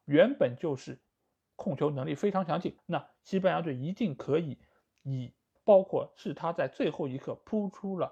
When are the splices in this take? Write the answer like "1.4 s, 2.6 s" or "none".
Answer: 2.8 s, 5.6 s